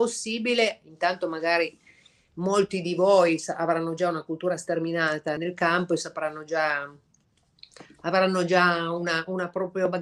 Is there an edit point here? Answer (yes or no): yes